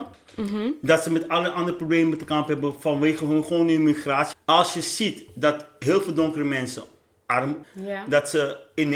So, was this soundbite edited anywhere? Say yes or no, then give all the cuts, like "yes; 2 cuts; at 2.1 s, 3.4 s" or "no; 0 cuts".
yes; 2 cuts; at 4.3 s, 7.6 s